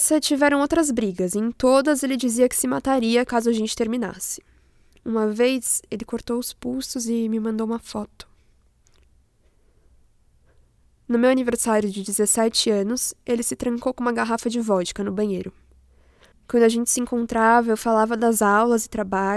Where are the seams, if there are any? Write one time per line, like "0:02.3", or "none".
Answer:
0:16.3